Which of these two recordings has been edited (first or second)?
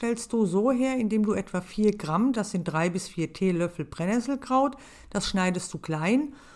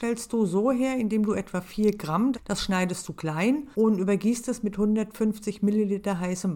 second